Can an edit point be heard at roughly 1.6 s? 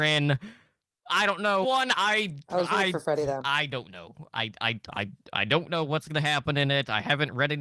yes; 1 cut; at 1.6 s

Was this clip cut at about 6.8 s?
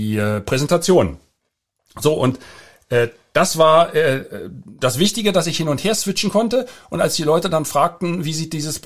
no; 0 cuts

